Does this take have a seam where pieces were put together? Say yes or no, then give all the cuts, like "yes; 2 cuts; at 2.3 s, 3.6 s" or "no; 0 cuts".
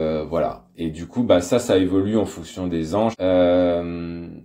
yes; 1 cut; at 3.1 s